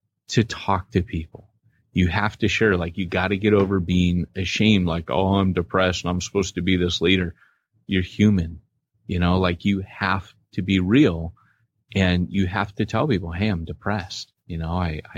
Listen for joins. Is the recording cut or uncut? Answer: uncut